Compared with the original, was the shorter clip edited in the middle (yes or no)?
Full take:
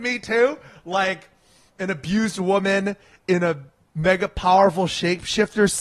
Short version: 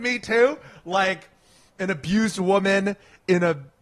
no